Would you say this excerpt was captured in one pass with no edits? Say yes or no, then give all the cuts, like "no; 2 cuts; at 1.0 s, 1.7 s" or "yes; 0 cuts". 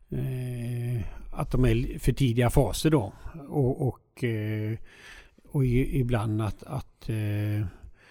yes; 0 cuts